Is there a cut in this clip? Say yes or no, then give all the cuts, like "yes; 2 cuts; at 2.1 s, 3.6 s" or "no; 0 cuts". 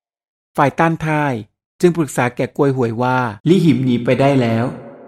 yes; 1 cut; at 3.4 s